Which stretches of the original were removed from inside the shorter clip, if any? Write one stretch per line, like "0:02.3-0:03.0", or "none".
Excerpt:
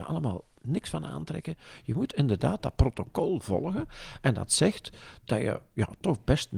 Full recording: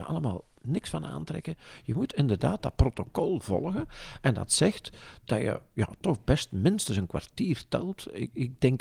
none